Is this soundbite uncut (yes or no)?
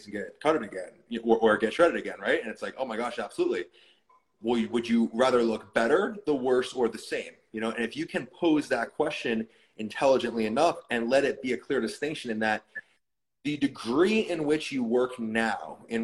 yes